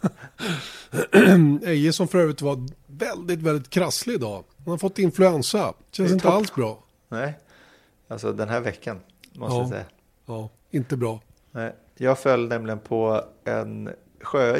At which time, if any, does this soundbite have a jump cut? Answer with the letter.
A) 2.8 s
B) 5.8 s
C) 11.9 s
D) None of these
B